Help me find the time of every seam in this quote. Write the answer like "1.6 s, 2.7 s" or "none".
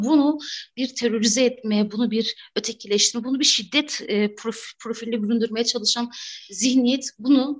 none